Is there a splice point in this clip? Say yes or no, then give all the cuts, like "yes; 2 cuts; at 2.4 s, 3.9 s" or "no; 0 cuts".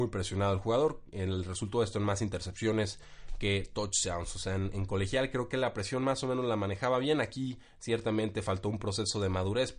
no; 0 cuts